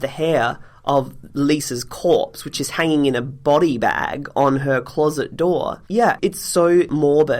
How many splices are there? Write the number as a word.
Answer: one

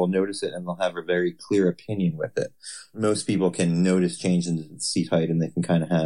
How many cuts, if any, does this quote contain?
one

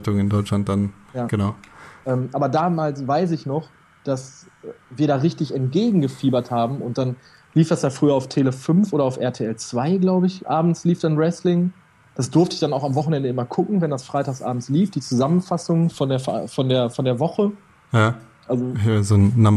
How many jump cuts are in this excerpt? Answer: one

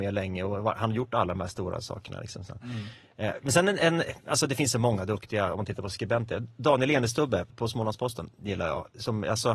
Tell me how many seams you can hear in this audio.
one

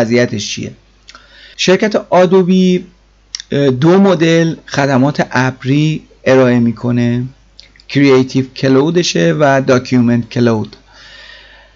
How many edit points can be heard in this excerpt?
zero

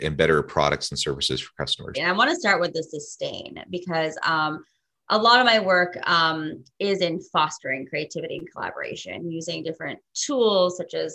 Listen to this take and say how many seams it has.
one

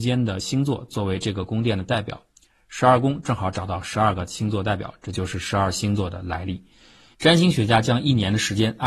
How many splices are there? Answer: one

